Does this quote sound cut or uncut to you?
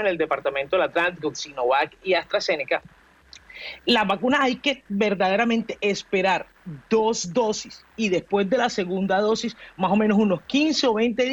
cut